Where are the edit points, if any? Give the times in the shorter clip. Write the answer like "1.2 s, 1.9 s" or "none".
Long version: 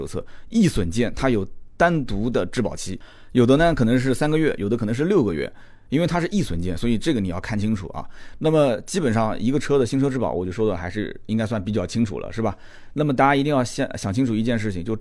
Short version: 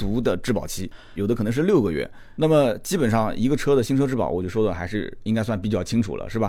1.2 s, 2.4 s